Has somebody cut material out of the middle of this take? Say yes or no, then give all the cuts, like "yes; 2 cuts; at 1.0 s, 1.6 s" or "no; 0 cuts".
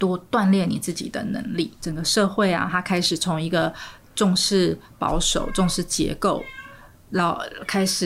no; 0 cuts